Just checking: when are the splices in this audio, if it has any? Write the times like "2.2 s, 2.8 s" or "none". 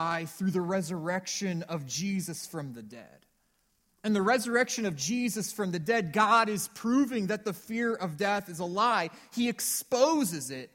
none